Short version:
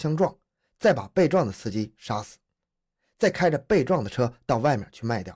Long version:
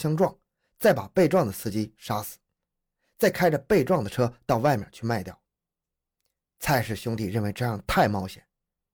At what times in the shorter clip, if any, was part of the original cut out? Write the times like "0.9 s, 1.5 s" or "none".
none